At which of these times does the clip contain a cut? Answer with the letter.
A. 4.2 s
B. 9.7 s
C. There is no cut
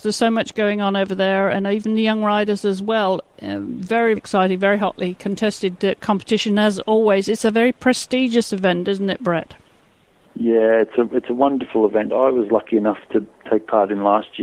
A